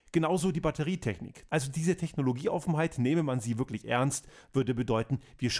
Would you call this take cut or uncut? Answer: cut